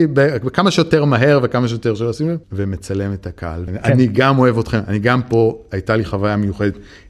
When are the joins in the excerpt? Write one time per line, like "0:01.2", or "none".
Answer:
0:02.4
0:03.7